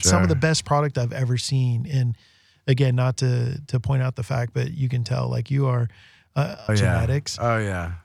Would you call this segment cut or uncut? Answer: cut